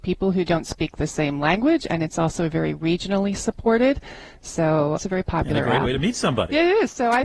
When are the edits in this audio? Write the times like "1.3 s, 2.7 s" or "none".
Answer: 5.0 s